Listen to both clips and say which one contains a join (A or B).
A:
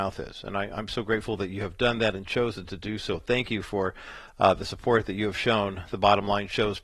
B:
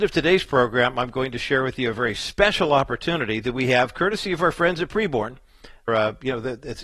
B